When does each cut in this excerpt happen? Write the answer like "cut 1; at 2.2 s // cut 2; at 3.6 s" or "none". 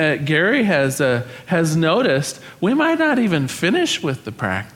none